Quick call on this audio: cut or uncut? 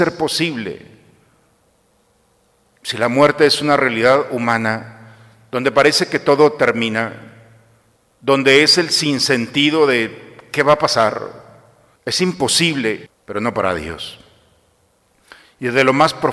cut